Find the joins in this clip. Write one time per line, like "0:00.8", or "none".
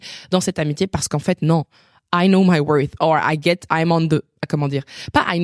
0:03.7

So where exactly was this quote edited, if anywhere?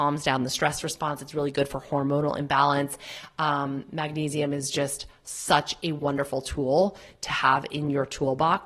none

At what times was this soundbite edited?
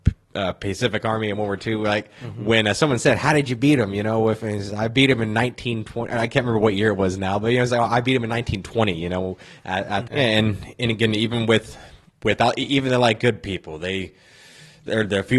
0:10.1

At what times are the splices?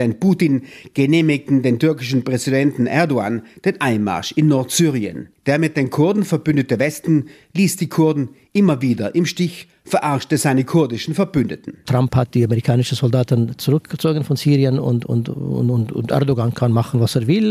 0:05.3

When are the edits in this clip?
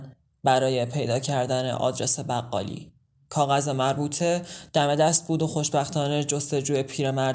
none

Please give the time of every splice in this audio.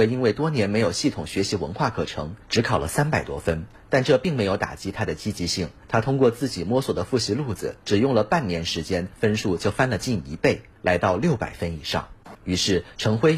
0:12.3

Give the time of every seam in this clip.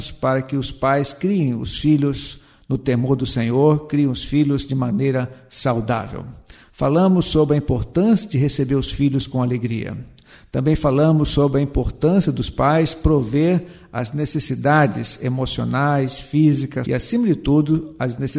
0:16.9

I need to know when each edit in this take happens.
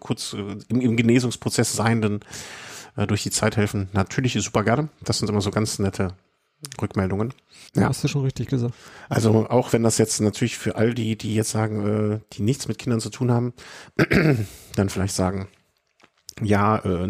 0:07.7

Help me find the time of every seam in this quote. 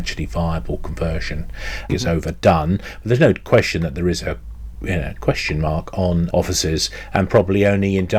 0:01.9
0:06.3

